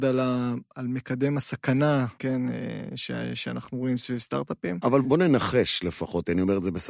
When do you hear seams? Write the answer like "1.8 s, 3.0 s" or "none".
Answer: 2.2 s, 5.0 s